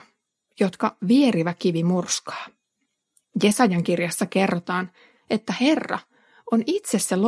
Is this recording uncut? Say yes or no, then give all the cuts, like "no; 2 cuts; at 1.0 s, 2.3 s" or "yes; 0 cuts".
yes; 0 cuts